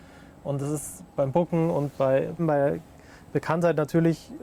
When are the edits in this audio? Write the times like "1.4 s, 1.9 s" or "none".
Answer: 1.1 s, 2.4 s

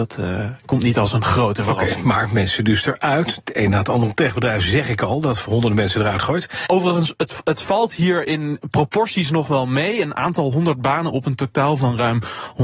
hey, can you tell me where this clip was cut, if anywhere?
6.7 s

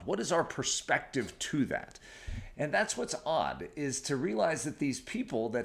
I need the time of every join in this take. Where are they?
2.5 s

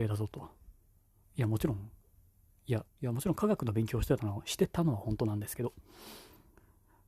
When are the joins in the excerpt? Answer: 1.2 s, 2.9 s

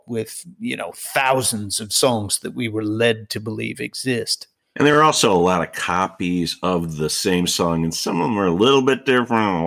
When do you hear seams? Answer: none

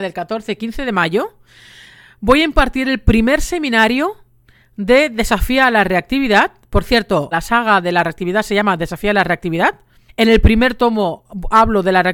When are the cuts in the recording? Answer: 7.3 s, 10.1 s

